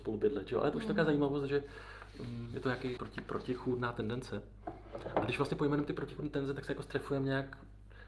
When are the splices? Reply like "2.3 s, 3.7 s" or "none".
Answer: 3.0 s